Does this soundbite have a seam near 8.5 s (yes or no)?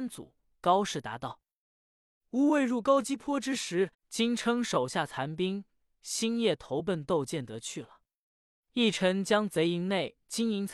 no